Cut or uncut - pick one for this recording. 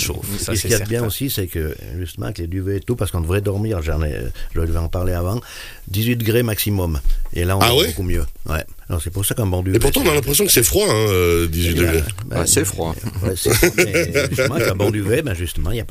uncut